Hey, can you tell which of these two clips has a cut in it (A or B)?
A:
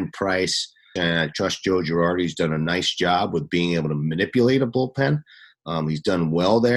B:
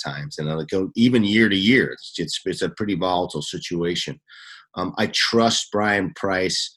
A